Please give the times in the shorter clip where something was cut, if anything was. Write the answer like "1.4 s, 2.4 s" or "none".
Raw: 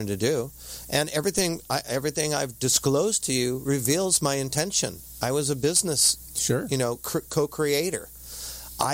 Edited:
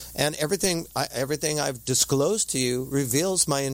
none

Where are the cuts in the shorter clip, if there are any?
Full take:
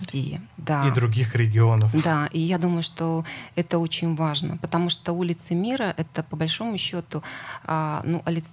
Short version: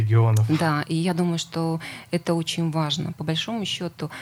3.1 s

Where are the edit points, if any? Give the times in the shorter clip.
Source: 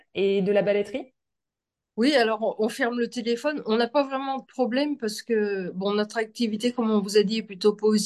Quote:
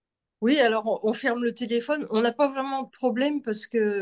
none

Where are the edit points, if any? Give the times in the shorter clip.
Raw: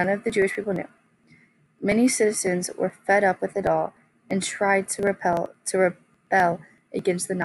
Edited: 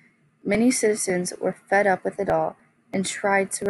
none

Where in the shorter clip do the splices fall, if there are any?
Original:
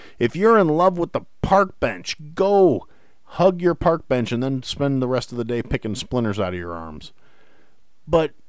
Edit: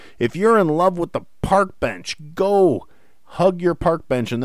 none

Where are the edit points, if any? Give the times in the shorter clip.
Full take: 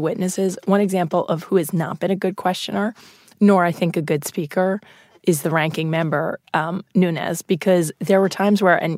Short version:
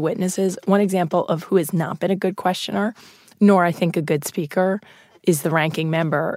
none

